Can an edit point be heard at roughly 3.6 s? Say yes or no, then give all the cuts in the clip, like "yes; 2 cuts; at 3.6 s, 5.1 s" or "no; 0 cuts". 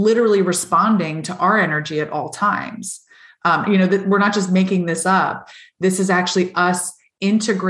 yes; 1 cut; at 3.6 s